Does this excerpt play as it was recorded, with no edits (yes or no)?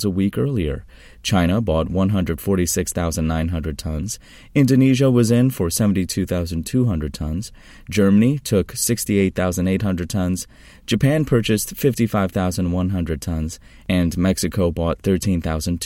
yes